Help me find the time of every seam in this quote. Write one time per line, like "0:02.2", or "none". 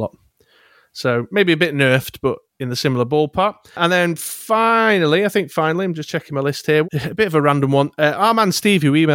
0:06.8